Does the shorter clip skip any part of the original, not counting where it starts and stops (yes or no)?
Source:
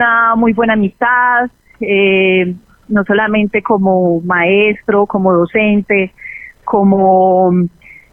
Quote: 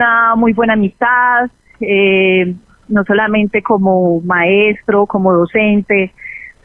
no